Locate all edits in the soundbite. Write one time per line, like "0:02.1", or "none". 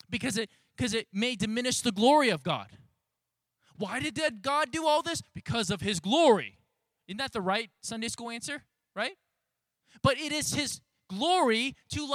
none